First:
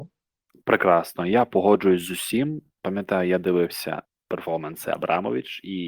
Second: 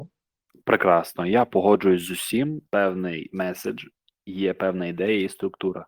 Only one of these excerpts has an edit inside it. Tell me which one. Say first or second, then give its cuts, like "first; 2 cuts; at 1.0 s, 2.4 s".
second; 1 cut; at 2.7 s